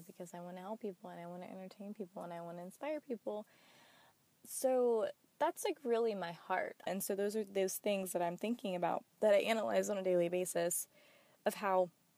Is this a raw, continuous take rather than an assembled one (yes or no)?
no